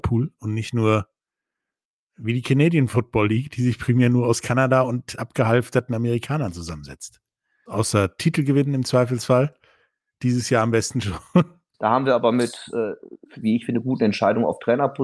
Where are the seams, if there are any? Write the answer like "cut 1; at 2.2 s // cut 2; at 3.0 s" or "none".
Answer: cut 1; at 7.7 s // cut 2; at 11.7 s // cut 3; at 13.3 s